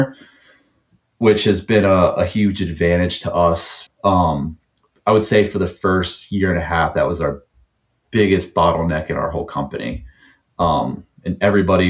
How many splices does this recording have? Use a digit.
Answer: 1